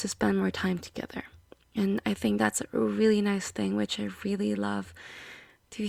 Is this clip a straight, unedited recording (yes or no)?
yes